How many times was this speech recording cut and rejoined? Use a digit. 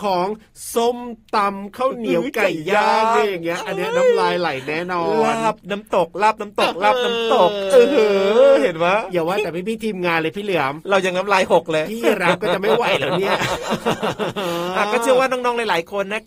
0